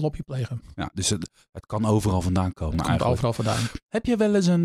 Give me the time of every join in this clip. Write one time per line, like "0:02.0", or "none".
none